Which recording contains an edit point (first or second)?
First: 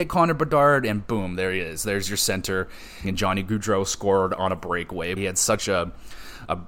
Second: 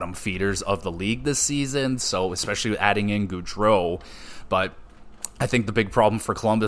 first